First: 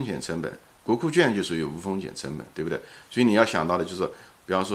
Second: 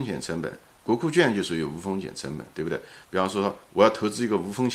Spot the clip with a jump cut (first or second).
second